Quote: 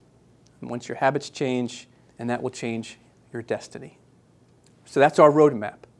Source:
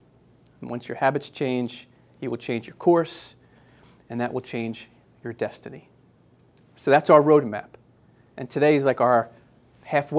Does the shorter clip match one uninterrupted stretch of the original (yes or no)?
no